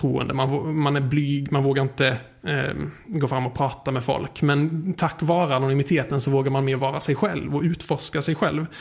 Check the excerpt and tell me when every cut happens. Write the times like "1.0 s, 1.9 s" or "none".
none